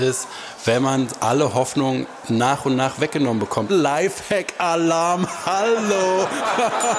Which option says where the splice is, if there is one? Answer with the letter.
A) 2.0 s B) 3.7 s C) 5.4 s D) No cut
B